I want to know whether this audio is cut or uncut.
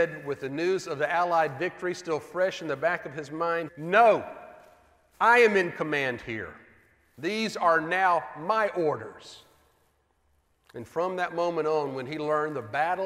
cut